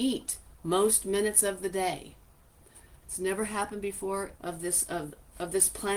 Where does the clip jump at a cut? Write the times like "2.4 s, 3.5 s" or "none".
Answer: 3.0 s, 4.3 s